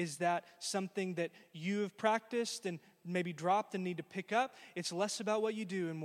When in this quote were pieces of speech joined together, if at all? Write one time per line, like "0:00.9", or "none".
none